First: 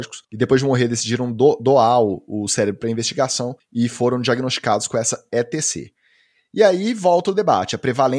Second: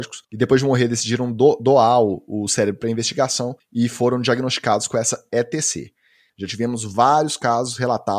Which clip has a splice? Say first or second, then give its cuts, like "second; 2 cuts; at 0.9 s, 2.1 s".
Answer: second; 1 cut; at 6.3 s